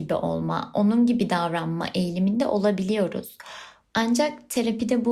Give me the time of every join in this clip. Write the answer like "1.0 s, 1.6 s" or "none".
3.9 s